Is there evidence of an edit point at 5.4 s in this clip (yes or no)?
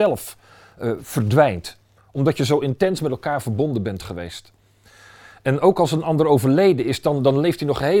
no